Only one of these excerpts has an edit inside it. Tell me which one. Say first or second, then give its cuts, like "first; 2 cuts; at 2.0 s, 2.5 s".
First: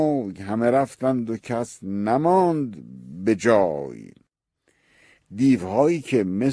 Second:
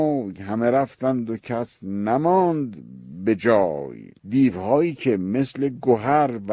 second; 1 cut; at 4.2 s